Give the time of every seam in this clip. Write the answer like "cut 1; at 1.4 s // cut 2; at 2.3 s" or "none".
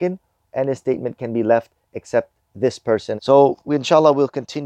cut 1; at 3.2 s